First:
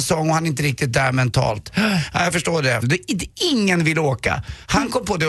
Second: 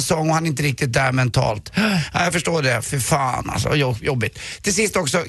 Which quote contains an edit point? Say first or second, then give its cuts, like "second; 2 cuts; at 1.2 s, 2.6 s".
first; 1 cut; at 2.8 s